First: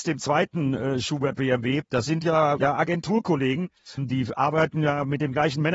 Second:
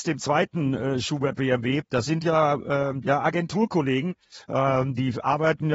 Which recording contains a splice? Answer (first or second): first